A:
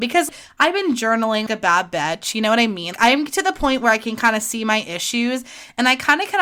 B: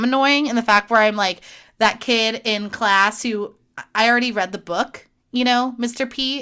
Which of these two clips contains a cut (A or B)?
A